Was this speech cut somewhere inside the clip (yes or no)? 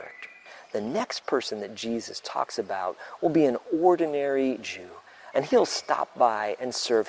yes